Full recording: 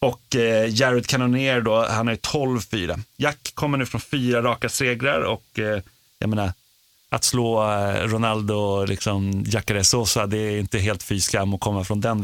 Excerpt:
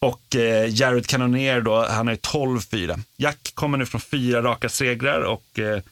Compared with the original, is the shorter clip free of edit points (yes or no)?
yes